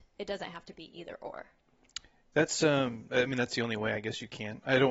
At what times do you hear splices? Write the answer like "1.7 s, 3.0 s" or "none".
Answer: none